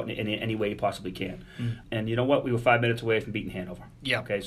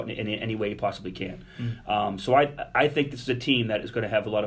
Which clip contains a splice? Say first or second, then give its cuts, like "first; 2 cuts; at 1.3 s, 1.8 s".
first; 1 cut; at 1.8 s